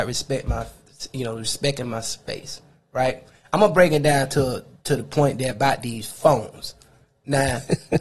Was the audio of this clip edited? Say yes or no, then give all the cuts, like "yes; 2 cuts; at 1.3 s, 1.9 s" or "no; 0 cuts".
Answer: no; 0 cuts